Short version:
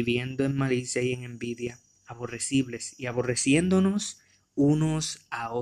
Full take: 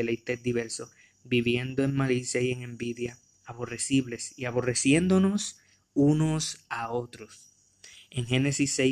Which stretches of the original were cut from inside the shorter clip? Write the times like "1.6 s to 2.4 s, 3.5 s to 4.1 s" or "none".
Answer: none

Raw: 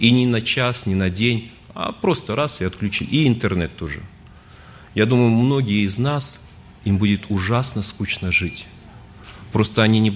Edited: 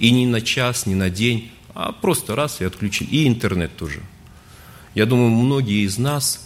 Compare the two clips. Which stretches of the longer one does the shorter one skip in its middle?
none

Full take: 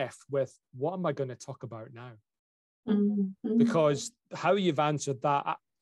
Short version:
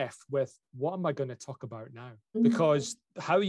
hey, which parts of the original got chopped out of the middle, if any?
2.3 s to 3.5 s

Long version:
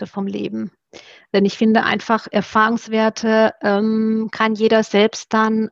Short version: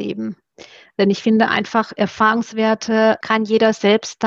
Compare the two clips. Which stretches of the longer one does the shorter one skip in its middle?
3.6 s to 4.3 s

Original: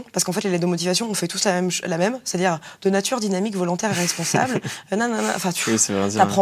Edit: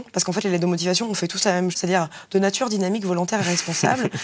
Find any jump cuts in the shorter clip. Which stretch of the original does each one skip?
1.7 s to 2.2 s

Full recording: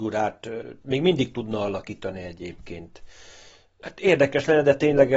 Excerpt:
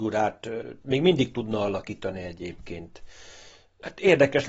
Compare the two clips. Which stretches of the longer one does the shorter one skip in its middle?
none

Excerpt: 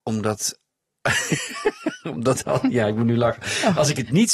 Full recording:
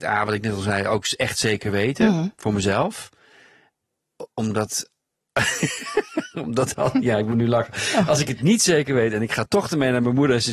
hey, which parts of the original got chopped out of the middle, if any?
none

